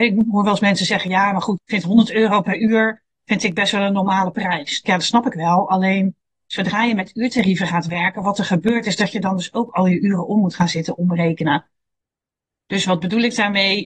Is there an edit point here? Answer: no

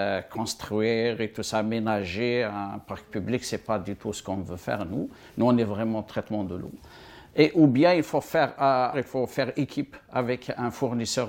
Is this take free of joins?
no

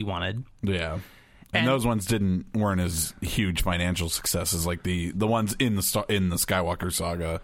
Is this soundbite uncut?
yes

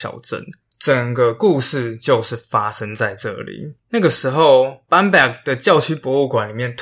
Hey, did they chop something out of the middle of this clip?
yes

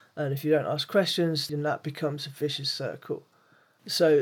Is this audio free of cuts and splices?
no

